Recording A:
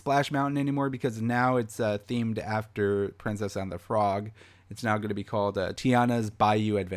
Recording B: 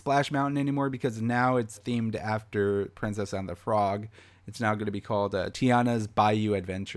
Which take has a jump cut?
B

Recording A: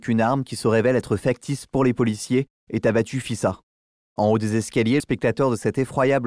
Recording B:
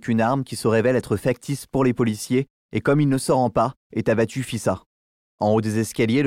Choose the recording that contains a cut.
A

